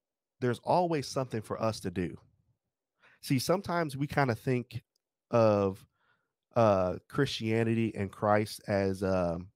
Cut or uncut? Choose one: uncut